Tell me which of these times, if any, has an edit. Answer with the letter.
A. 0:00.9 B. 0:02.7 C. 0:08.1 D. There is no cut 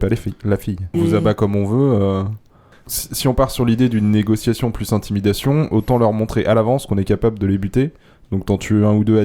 A